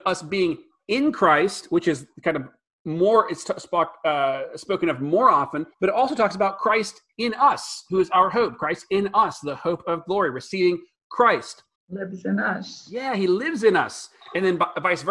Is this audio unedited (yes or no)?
no